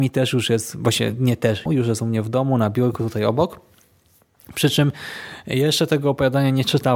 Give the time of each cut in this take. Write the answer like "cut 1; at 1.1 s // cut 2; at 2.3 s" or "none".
cut 1; at 1.7 s